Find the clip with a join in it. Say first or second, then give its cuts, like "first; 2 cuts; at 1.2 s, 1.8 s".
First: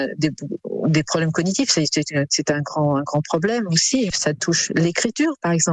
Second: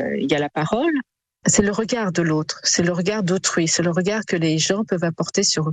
second; 1 cut; at 1.4 s